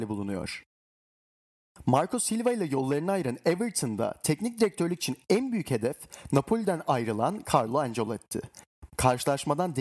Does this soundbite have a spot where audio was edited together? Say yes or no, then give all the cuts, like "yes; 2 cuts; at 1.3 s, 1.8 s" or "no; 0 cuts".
yes; 1 cut; at 8.9 s